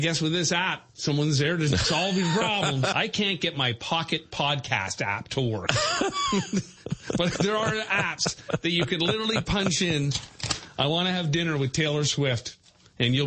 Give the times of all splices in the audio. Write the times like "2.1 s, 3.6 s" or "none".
2.9 s